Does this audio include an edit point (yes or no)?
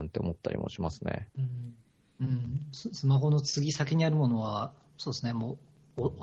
yes